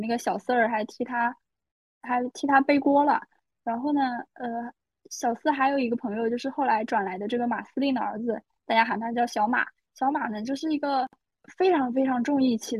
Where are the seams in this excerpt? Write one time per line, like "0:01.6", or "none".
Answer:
none